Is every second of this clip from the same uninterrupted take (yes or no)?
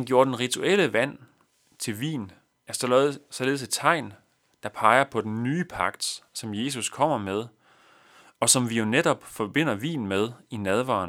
yes